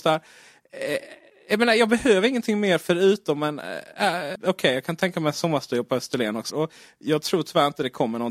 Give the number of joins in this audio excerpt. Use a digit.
2